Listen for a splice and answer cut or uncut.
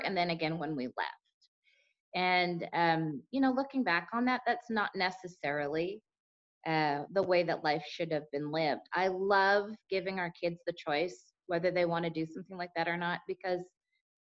uncut